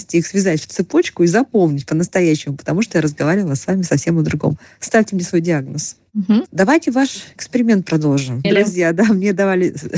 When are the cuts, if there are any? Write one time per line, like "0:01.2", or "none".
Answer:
0:06.5
0:08.4